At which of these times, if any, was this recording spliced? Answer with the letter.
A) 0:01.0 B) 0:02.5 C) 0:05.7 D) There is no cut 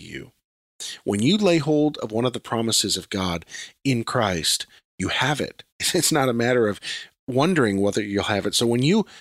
C